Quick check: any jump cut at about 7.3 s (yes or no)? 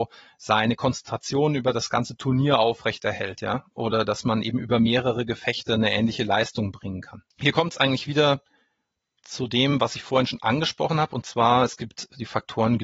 yes